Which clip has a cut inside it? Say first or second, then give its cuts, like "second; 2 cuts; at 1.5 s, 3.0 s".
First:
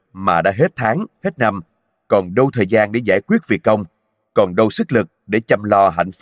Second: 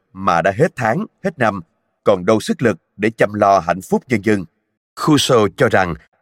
second; 2 cuts; at 2.0 s, 4.8 s